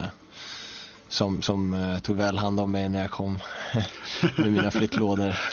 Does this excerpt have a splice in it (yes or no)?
no